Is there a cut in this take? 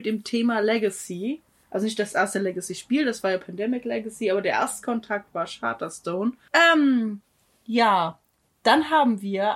yes; 1 cut; at 6.5 s

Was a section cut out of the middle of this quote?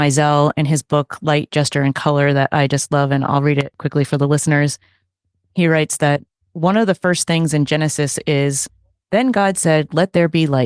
no; 0 cuts

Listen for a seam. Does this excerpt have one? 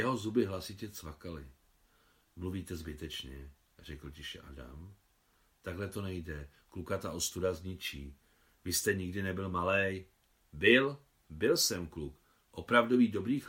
no; 0 cuts

